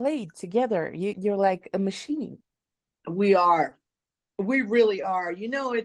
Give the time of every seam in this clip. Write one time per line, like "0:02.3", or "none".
0:01.1